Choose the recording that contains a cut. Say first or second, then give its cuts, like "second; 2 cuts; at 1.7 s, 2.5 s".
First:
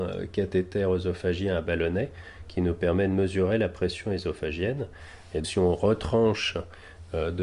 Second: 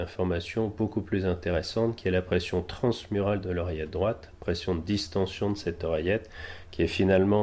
first; 1 cut; at 5.4 s